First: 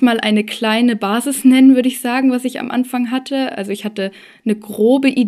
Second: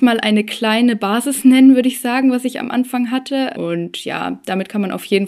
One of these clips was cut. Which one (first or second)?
second